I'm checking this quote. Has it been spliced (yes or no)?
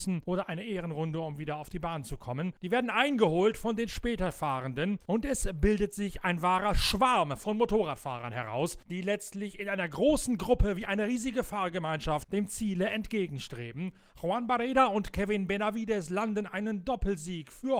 no